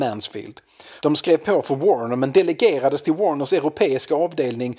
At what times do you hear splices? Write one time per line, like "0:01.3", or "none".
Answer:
0:01.0